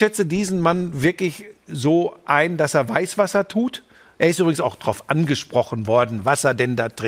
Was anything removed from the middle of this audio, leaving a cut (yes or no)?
no